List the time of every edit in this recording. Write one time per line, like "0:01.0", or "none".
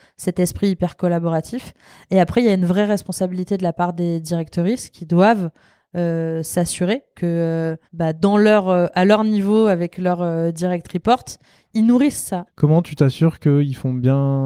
0:07.8
0:12.5